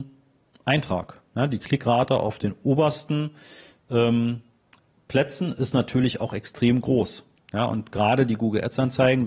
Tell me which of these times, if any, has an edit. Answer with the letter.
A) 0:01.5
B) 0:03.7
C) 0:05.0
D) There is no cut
D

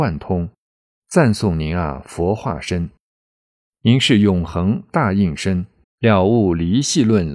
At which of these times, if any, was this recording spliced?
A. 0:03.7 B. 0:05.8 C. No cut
B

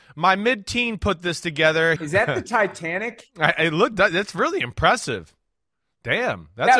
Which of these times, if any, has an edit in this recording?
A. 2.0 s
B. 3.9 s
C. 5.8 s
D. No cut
A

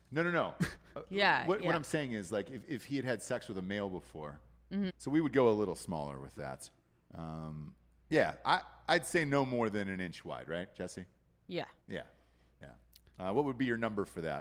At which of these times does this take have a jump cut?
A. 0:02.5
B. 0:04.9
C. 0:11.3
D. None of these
B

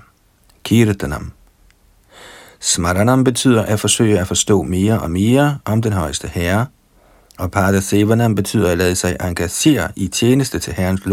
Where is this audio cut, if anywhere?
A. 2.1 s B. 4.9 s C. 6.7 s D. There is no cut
D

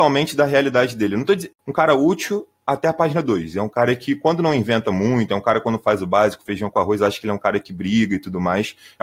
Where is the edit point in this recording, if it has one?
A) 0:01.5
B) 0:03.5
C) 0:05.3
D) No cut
A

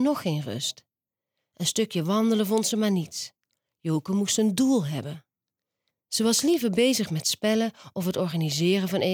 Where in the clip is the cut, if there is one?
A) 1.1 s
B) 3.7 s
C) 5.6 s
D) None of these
D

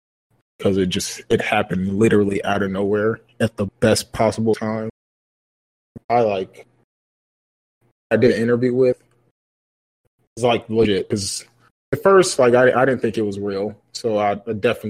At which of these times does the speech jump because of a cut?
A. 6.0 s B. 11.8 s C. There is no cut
A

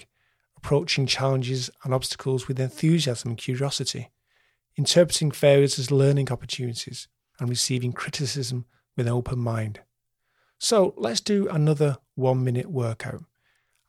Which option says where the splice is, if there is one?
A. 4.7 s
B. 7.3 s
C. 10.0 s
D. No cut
B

